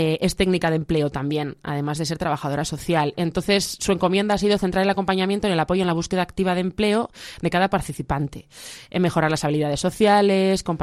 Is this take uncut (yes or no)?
yes